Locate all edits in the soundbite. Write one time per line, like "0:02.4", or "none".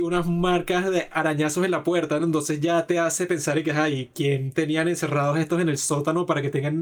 none